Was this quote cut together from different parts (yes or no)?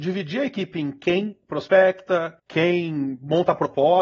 yes